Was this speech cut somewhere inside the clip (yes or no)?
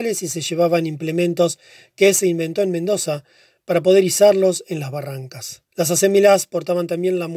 yes